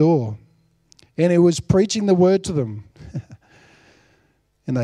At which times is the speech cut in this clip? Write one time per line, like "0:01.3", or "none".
0:02.9

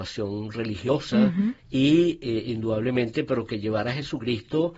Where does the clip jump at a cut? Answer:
0:01.6

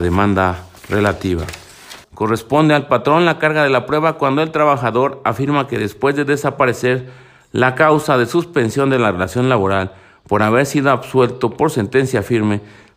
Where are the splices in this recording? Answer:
0:02.0

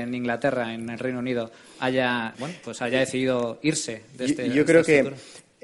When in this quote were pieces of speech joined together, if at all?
0:02.3

